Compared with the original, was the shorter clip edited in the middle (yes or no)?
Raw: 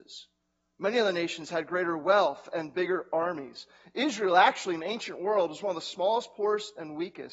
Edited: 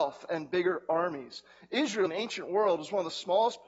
yes